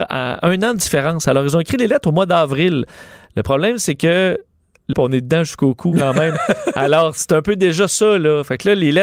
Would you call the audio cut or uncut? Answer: cut